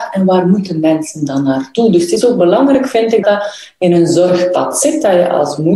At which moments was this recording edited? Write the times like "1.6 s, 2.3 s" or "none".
3.2 s